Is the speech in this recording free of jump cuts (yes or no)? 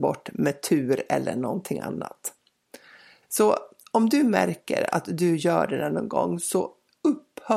no